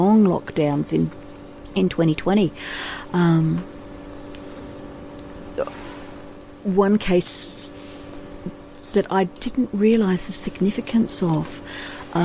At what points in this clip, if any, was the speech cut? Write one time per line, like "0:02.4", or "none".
none